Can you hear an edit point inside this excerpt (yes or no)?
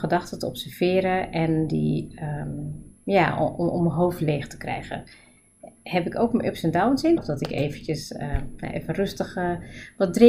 yes